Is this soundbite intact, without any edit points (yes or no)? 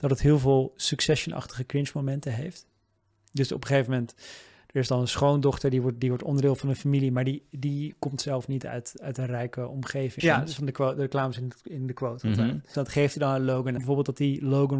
no